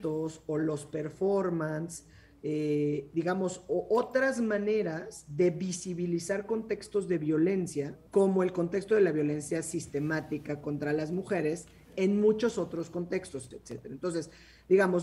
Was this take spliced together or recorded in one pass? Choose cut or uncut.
cut